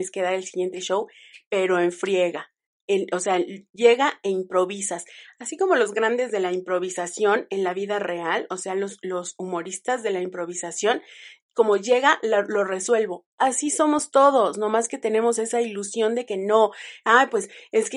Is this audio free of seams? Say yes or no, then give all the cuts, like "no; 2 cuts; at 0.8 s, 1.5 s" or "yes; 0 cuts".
yes; 0 cuts